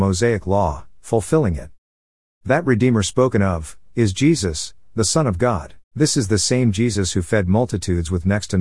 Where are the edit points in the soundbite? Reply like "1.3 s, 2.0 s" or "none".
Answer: 3.9 s, 5.9 s

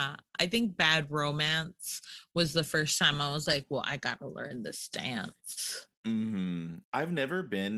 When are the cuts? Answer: 6.8 s

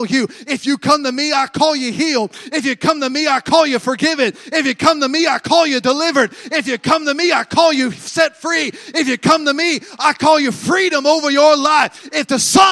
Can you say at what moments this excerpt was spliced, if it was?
none

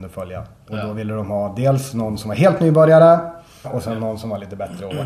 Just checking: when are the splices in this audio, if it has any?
3.6 s

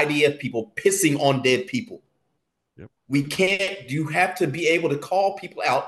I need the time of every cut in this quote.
none

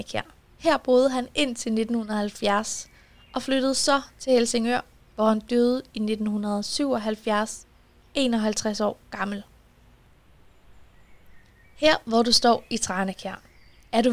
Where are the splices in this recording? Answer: none

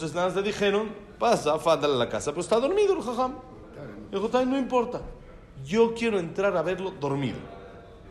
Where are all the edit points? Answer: none

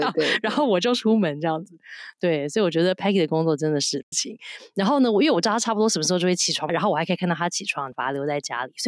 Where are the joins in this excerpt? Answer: 4.1 s, 6.7 s, 7.9 s

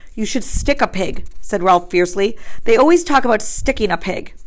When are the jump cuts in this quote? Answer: none

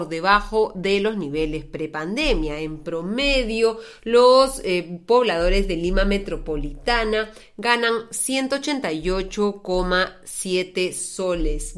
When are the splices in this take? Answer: none

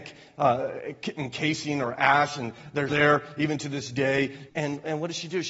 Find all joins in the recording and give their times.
2.9 s, 4.5 s

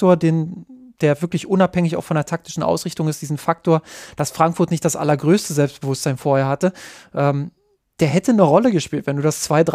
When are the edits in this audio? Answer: none

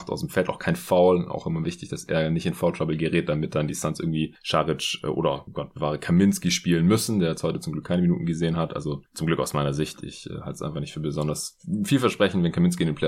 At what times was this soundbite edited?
none

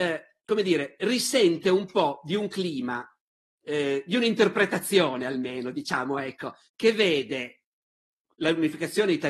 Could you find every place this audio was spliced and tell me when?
6.7 s

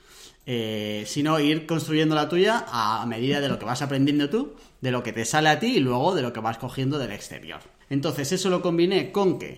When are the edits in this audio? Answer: 7.8 s

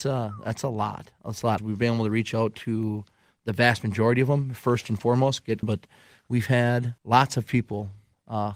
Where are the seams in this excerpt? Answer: 1.6 s, 5.6 s, 7.0 s

